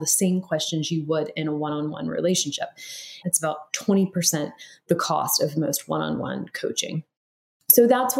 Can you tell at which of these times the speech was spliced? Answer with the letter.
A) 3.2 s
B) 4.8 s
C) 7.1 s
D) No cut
A